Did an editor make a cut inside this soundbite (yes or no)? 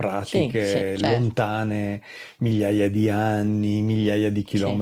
no